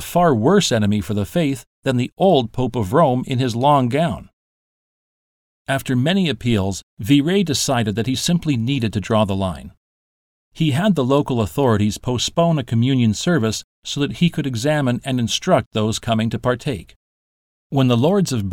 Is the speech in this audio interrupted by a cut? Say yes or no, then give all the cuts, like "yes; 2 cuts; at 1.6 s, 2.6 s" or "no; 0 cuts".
no; 0 cuts